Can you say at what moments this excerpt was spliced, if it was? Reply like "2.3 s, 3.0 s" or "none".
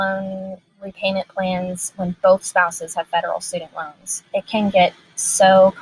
none